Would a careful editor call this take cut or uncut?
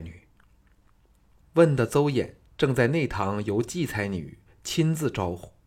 cut